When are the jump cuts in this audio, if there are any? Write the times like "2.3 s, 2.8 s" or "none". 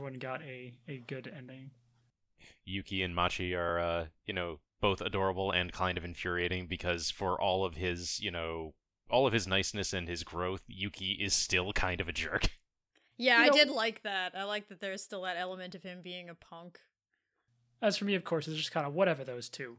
none